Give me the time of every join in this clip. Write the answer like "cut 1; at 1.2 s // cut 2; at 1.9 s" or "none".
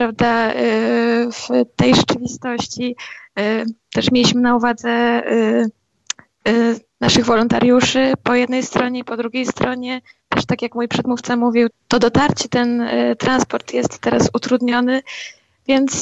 cut 1; at 11.7 s